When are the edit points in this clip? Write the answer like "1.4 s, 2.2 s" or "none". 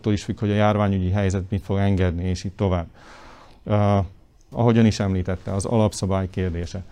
4.5 s